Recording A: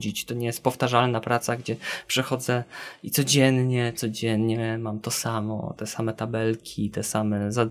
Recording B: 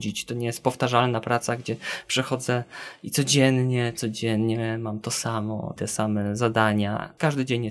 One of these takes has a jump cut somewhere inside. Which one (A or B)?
B